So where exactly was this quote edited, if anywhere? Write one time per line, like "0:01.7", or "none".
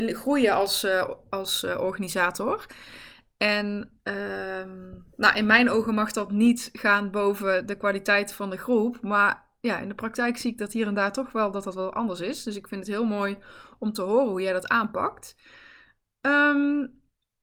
none